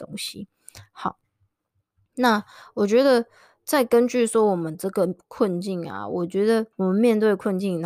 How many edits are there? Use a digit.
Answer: 1